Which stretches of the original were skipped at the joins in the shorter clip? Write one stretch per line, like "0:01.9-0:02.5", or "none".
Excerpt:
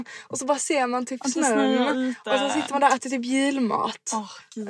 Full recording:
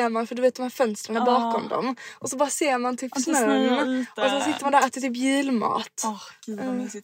none